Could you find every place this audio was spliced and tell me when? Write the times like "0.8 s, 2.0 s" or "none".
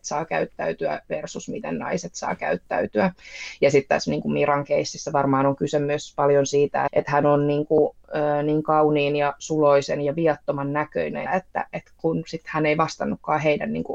6.9 s, 11.3 s